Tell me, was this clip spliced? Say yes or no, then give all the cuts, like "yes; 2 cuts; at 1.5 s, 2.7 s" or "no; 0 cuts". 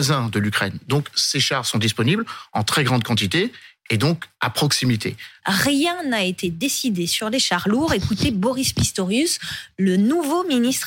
yes; 1 cut; at 5.4 s